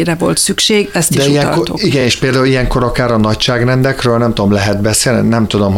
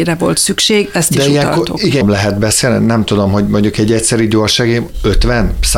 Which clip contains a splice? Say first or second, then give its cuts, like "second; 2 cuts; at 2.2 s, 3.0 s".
second; 1 cut; at 2.0 s